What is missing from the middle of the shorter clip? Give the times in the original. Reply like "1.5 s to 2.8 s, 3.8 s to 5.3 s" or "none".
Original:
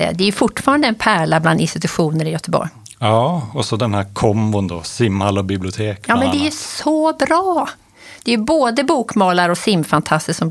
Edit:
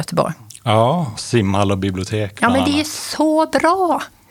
3.5 s to 4.8 s